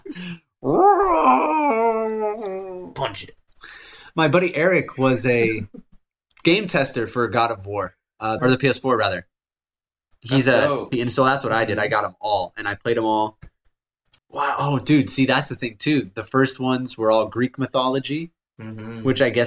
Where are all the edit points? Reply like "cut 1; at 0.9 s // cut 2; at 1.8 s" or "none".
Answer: cut 1; at 8.4 s // cut 2; at 10.9 s // cut 3; at 14.2 s